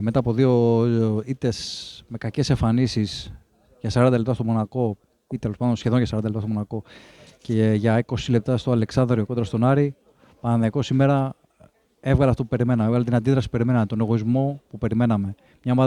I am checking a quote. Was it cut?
no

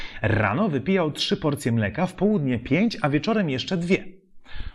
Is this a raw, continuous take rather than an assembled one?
yes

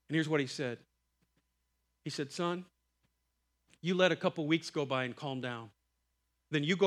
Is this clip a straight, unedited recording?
yes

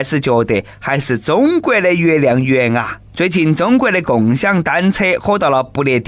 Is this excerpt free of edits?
no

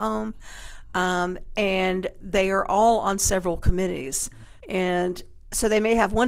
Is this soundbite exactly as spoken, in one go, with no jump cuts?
no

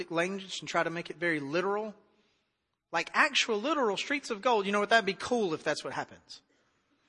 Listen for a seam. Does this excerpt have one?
no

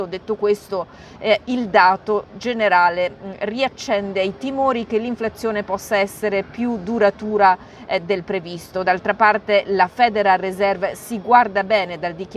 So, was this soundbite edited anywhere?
no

